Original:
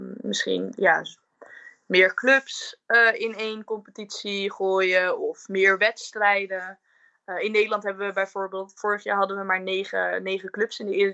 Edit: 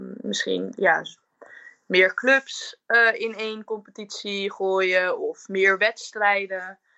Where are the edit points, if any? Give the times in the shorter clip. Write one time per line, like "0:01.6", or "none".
none